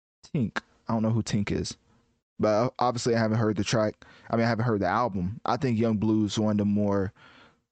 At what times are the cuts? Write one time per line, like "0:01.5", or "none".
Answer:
0:02.4